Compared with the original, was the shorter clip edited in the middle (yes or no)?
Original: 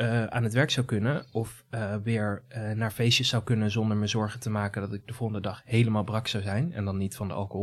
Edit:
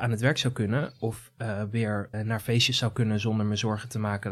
yes